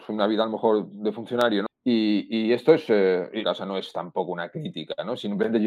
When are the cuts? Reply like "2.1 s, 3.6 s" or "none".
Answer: 1.7 s, 3.4 s